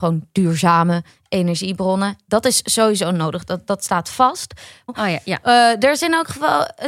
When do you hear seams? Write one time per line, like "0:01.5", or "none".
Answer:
0:04.9